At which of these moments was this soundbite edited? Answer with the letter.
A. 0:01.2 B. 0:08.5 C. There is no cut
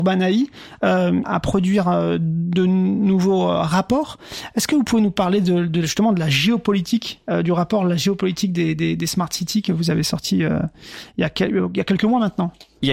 A